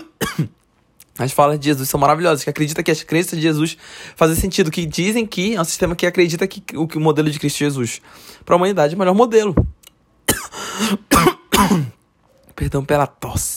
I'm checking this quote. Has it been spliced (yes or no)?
no